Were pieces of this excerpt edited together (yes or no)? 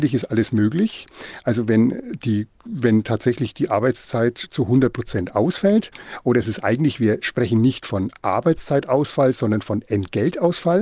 no